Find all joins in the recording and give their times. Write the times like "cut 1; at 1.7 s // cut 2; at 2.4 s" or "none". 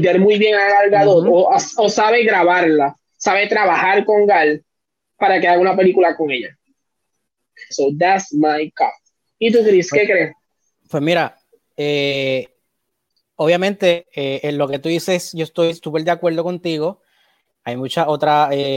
cut 1; at 7.7 s